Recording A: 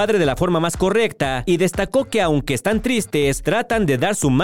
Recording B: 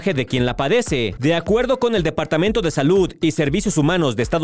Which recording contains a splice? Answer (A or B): B